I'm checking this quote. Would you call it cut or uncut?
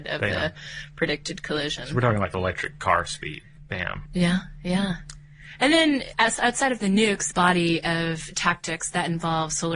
cut